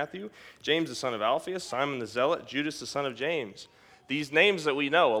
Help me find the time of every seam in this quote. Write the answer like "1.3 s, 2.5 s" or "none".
none